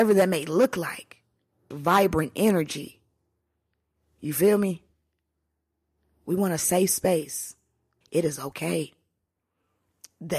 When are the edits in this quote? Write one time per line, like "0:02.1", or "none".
0:01.7
0:08.0